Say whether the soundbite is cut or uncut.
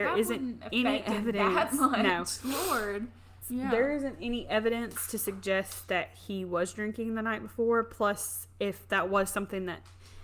cut